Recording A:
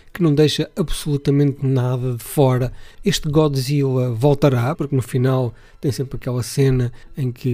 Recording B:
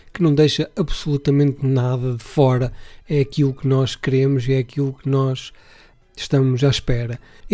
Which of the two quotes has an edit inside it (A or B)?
A